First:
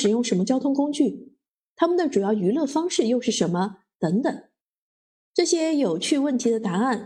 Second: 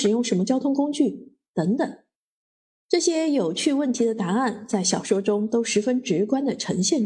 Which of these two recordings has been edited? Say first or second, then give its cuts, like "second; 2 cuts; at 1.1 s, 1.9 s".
second; 1 cut; at 1.5 s